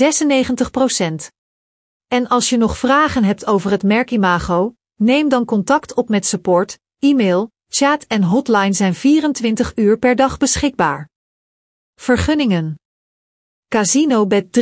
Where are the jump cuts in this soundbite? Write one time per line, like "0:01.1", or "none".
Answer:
0:01.9